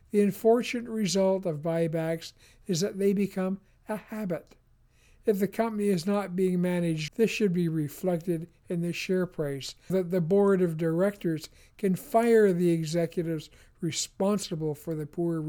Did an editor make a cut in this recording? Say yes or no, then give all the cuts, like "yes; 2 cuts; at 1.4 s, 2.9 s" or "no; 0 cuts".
yes; 2 cuts; at 7.1 s, 9.9 s